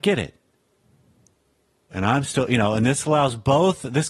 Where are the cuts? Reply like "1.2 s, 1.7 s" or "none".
1.9 s

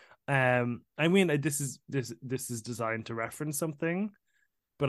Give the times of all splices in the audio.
none

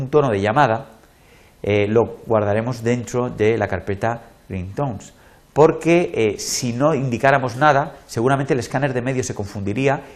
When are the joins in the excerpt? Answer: none

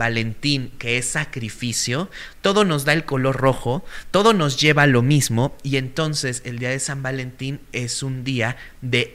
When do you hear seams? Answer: none

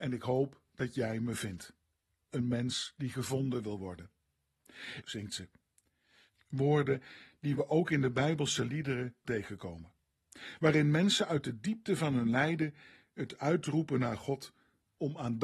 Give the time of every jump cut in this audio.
5.0 s, 9.2 s

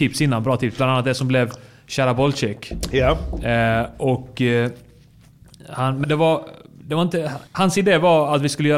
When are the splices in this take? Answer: 6.0 s, 7.5 s

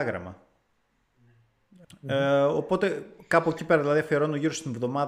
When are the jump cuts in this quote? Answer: 1.8 s

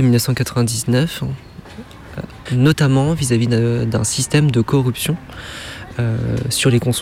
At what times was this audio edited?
2.5 s

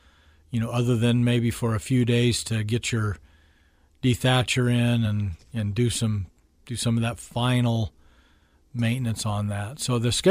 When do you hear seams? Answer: none

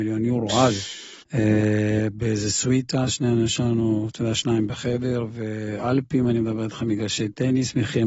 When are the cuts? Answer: 1.2 s

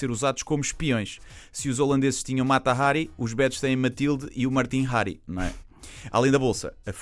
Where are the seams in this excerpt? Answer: none

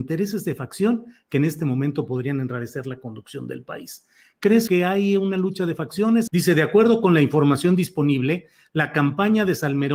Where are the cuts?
4.7 s, 6.3 s

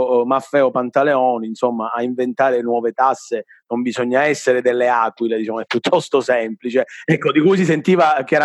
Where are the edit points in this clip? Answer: 7.1 s

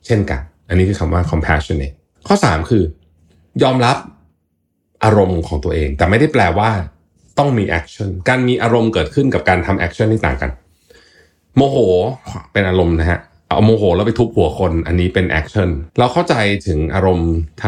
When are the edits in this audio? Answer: 15.9 s

